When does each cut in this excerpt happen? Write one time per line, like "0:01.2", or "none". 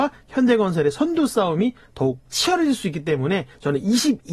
0:02.2